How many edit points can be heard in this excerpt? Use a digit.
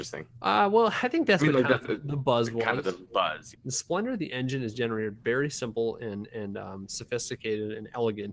1